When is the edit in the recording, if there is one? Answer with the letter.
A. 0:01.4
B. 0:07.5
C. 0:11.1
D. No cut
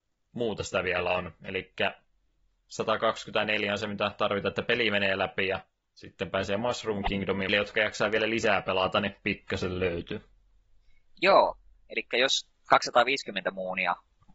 B